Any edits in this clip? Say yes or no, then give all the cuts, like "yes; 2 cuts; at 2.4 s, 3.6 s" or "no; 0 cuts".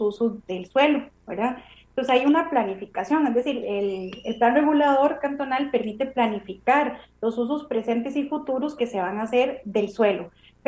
yes; 2 cuts; at 3.6 s, 9.6 s